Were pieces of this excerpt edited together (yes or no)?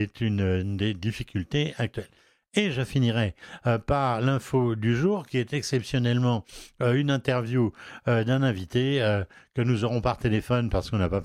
no